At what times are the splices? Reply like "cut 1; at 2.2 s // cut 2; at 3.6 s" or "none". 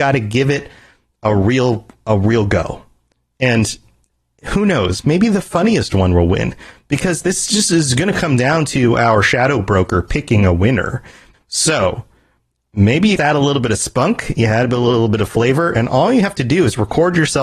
cut 1; at 11.3 s // cut 2; at 13.2 s